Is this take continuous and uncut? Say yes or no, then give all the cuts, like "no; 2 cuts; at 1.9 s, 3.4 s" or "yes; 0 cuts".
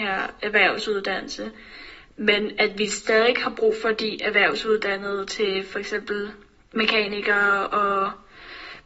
yes; 0 cuts